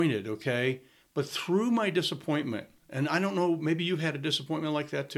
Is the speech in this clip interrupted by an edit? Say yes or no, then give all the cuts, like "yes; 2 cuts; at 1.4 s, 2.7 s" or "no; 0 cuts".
no; 0 cuts